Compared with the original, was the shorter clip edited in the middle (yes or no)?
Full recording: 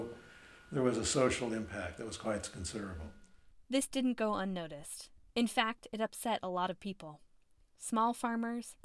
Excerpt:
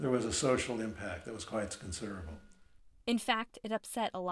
yes